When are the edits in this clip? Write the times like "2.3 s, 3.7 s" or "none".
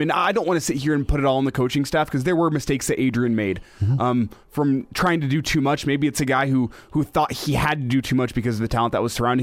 none

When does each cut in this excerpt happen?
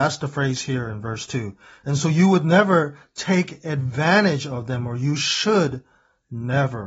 none

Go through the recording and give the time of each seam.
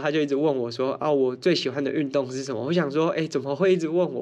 none

